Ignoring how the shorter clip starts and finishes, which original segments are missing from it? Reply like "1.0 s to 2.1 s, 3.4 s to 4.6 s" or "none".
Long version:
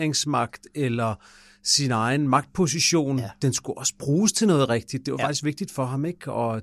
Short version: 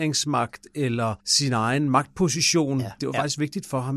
1.2 s to 1.6 s, 3.4 s to 5.0 s